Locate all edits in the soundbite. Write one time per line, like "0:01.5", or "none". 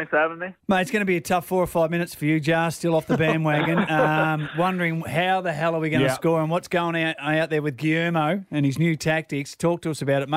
none